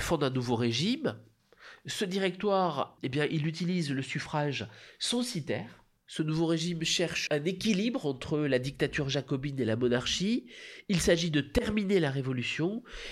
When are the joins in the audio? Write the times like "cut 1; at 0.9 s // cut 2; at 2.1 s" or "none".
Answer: cut 1; at 3.0 s // cut 2; at 6.0 s // cut 3; at 7.3 s